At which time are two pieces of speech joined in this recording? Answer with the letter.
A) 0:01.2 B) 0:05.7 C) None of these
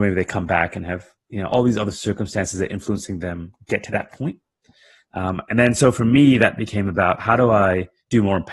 C